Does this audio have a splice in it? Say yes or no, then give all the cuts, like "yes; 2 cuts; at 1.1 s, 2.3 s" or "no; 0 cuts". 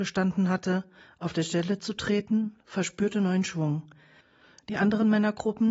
no; 0 cuts